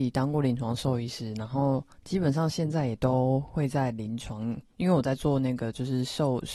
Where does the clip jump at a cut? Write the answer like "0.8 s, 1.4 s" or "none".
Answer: none